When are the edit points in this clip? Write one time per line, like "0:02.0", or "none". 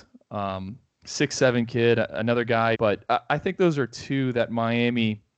0:02.7